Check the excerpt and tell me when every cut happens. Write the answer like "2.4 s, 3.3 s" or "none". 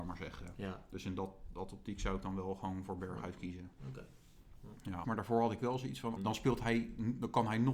5.0 s, 6.2 s